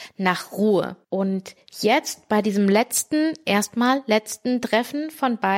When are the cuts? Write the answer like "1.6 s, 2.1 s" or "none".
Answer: 1.0 s